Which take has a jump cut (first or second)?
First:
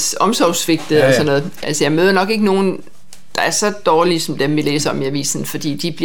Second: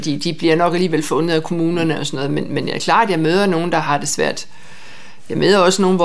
first